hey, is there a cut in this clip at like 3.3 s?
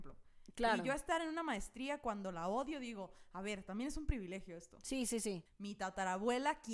no; 1 cut; at 5.5 s

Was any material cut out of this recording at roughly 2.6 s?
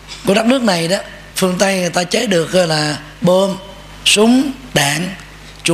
no; 1 cut; at 1.3 s

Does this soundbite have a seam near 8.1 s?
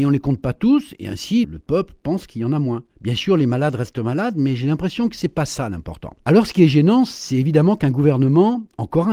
no; 3 cuts; at 1.4 s, 2.9 s, 6.2 s

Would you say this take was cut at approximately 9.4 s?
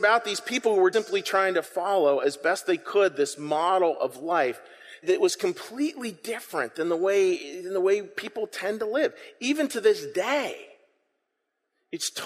no; 2 cuts; at 0.9 s, 5.0 s

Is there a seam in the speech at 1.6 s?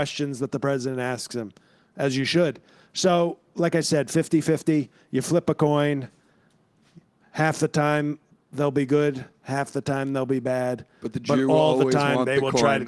no; 0 cuts

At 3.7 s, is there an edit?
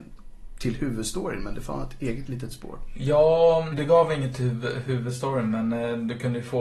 yes; 1 cut; at 3.7 s

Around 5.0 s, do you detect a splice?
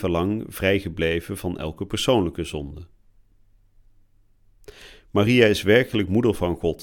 no; 0 cuts

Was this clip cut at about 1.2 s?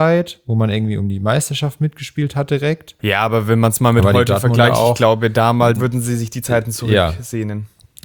no; 2 cuts; at 3.0 s, 5.8 s

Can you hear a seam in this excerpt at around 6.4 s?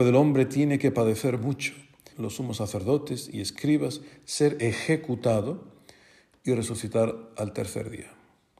no; 1 cut; at 2.1 s

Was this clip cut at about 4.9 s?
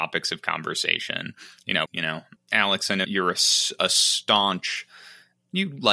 no; 2 cuts; at 1.9 s, 3.0 s

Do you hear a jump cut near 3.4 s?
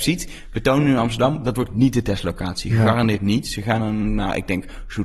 no; 0 cuts

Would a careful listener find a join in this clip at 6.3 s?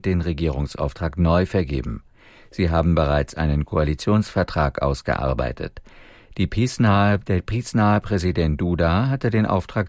no; 1 cut; at 2.4 s

